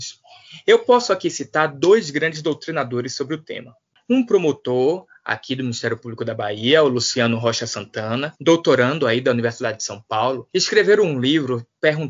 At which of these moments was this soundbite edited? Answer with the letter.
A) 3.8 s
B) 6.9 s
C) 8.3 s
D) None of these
C